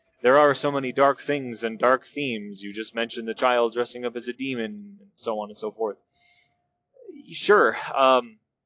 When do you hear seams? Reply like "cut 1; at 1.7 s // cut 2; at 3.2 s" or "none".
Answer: none